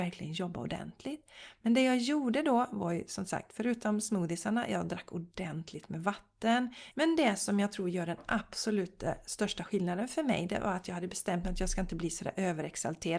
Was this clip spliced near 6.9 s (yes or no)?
yes